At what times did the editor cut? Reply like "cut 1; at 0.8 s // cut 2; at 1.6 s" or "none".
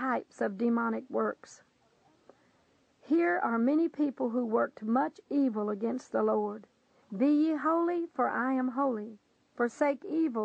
cut 1; at 7.0 s